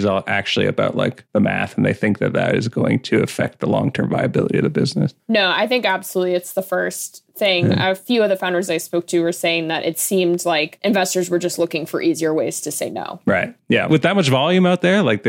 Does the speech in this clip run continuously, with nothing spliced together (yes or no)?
yes